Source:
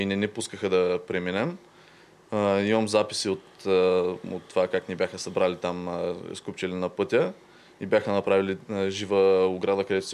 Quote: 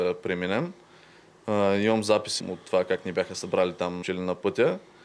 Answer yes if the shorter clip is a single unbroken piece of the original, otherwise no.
no